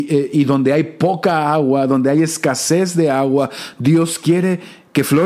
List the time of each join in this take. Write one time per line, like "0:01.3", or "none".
none